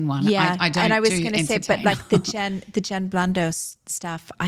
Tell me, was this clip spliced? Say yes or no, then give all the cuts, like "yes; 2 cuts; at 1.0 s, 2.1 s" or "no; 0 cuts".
no; 0 cuts